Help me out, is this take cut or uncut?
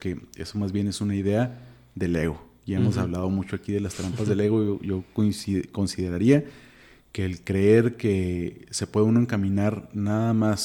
uncut